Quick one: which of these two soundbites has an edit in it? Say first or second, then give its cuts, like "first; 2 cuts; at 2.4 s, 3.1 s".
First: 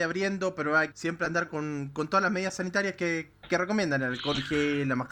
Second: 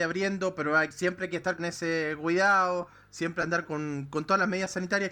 first; 1 cut; at 0.9 s